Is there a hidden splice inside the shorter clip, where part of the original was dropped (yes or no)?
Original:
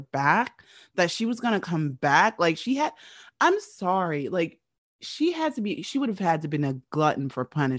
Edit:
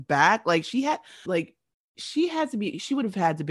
yes